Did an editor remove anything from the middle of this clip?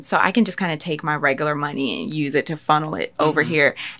no; 0 cuts

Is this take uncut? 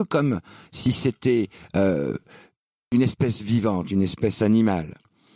yes; 0 cuts

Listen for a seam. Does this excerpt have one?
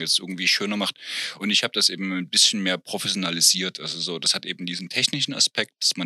no; 0 cuts

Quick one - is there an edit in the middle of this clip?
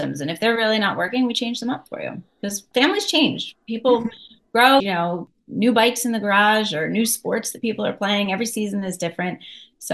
yes; 2 cuts; at 2.7 s, 4.8 s

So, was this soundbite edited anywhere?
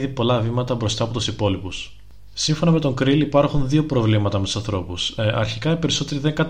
no; 0 cuts

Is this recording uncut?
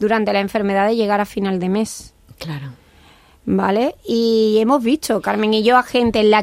yes; 0 cuts

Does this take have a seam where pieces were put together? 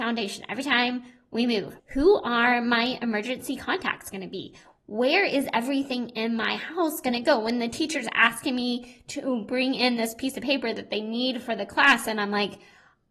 yes; 2 cuts; at 1.8 s, 4.7 s

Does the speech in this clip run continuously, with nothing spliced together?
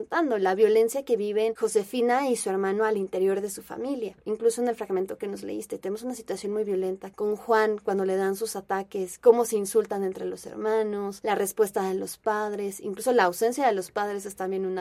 yes; 0 cuts

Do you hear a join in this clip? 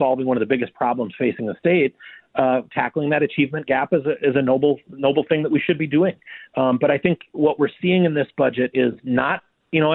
no; 0 cuts

